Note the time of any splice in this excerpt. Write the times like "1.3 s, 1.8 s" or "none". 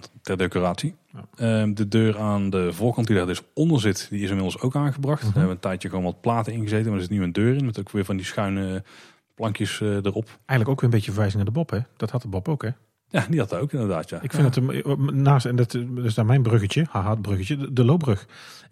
none